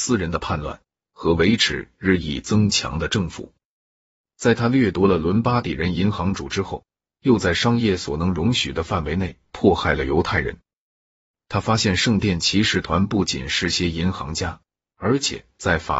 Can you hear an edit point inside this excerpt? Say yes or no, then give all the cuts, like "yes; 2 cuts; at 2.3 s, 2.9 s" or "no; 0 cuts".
no; 0 cuts